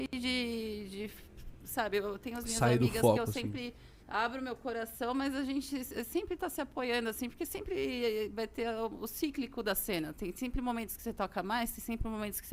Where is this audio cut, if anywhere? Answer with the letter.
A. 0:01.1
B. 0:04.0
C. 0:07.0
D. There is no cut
B